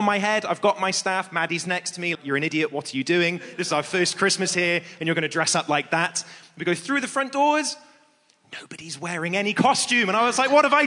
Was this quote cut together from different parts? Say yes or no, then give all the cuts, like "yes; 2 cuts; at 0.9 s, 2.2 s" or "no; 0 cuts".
yes; 1 cut; at 2.1 s